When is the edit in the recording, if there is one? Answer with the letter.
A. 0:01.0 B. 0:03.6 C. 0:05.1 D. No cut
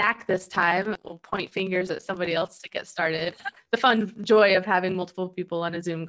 D